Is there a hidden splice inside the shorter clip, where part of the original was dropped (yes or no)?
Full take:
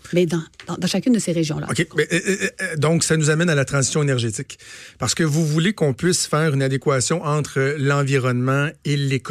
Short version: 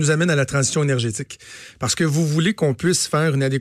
no